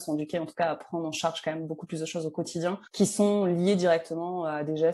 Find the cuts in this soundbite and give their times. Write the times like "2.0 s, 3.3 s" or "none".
2.9 s